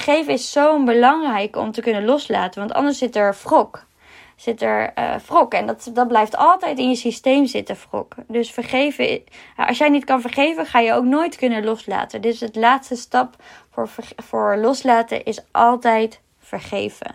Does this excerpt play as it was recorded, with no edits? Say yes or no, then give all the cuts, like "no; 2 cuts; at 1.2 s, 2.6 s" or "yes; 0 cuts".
yes; 0 cuts